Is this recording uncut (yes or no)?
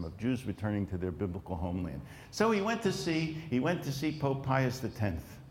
no